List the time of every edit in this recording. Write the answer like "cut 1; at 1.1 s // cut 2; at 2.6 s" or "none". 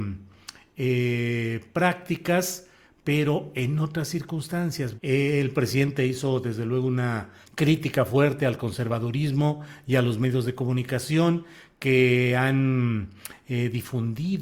cut 1; at 5.0 s // cut 2; at 7.4 s